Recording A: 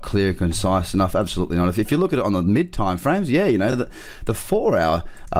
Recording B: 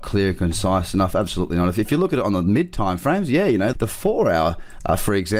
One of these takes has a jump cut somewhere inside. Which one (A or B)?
B